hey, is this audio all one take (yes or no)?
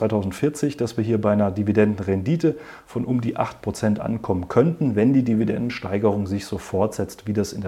yes